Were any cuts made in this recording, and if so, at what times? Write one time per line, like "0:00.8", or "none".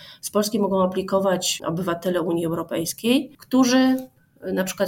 0:01.6
0:03.3